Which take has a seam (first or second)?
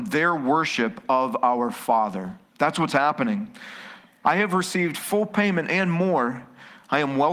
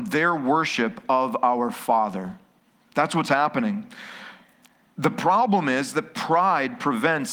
first